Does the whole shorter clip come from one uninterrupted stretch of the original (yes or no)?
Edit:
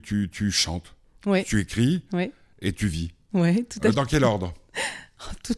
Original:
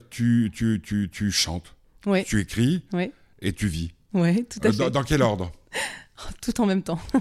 no